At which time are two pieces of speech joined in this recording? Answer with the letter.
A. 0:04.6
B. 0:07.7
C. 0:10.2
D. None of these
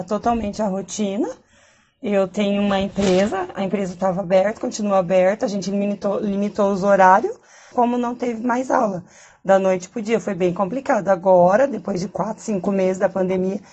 B